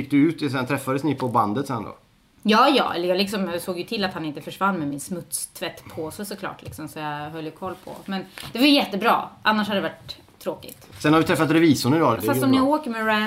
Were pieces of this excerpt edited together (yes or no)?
yes